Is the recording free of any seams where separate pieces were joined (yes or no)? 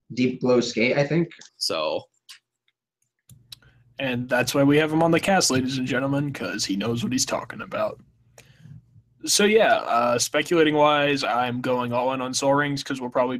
no